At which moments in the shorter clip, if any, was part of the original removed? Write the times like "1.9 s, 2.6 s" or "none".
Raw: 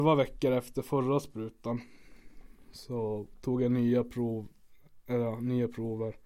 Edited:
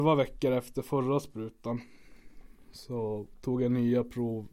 none